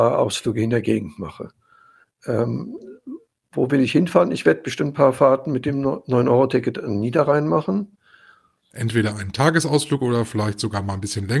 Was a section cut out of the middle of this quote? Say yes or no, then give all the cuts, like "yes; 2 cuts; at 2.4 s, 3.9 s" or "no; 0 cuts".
yes; 1 cut; at 8.7 s